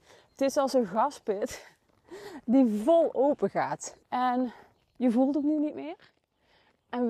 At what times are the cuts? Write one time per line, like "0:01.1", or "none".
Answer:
0:04.0